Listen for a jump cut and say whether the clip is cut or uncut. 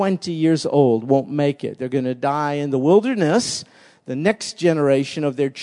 uncut